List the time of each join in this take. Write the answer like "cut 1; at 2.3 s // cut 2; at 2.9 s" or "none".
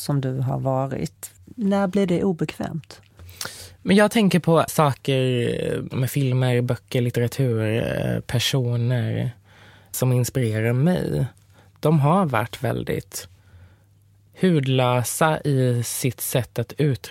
cut 1; at 4.7 s